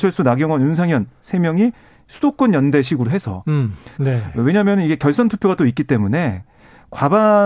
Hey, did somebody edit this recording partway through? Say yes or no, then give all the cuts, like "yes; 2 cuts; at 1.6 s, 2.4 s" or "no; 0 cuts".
yes; 1 cut; at 4.0 s